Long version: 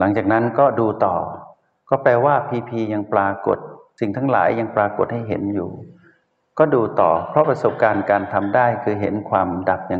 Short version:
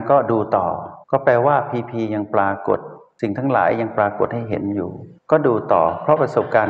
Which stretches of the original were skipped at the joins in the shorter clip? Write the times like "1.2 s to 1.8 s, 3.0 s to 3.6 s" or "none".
1.5 s to 1.8 s, 6.0 s to 6.5 s